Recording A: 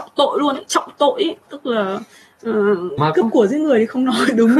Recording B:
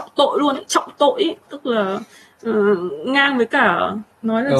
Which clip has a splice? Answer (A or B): A